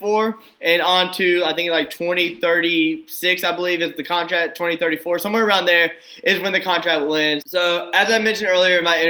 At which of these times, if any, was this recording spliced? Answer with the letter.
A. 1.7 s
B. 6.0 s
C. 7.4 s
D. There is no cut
C